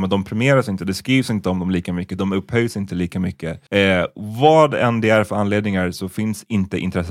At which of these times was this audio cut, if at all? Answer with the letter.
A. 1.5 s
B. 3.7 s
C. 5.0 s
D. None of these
B